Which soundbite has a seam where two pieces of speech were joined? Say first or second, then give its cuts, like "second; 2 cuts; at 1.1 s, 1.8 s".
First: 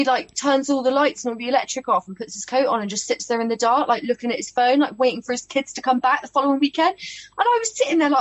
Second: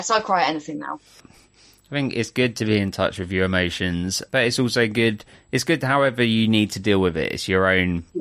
second; 2 cuts; at 1.2 s, 4.3 s